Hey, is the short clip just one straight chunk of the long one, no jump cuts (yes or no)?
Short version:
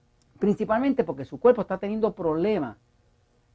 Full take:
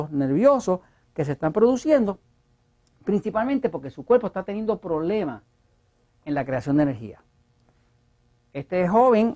yes